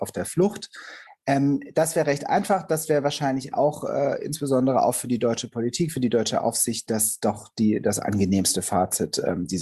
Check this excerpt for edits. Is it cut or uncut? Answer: cut